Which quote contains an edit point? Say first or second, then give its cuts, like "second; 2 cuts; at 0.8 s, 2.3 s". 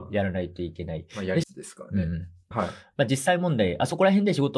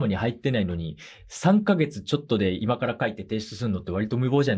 first; 2 cuts; at 1.4 s, 2.5 s